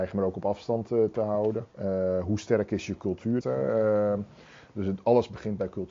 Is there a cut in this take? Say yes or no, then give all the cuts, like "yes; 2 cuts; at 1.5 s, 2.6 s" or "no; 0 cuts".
yes; 2 cuts; at 1.7 s, 3.4 s